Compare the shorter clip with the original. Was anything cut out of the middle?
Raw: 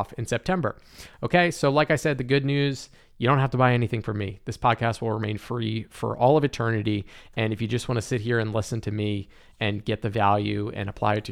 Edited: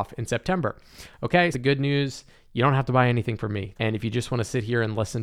yes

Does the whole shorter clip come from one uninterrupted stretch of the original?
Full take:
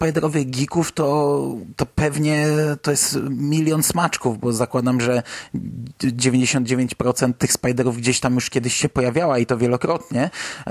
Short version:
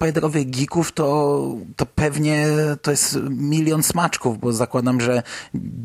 yes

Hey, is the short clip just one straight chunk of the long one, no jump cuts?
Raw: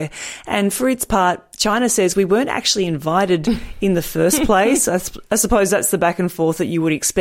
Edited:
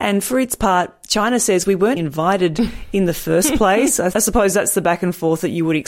no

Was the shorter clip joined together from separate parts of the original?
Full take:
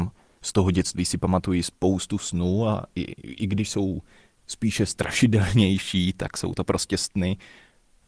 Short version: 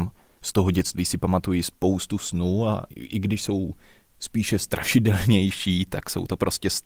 yes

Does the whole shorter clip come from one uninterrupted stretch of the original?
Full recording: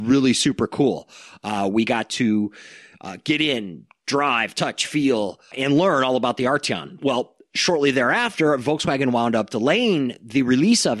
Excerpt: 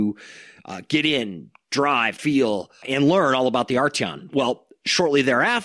no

